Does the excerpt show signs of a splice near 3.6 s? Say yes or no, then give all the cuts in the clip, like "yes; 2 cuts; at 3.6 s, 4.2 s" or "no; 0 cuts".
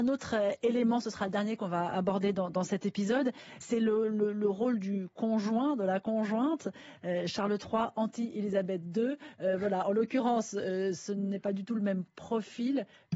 yes; 1 cut; at 3.6 s